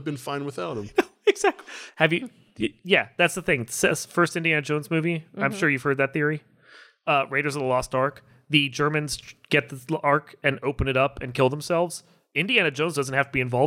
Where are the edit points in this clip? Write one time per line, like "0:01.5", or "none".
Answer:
none